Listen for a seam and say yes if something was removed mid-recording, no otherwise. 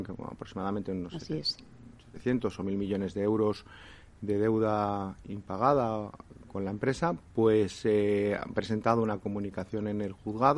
no